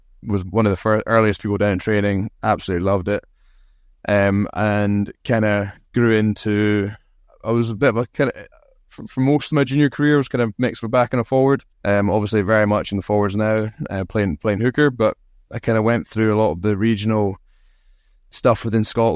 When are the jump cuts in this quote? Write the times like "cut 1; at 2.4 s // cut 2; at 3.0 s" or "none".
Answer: cut 1; at 11.7 s